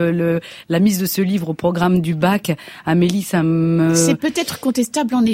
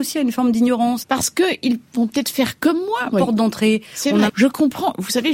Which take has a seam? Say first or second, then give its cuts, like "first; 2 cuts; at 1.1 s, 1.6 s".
second; 3 cuts; at 1.0 s, 3.1 s, 4.3 s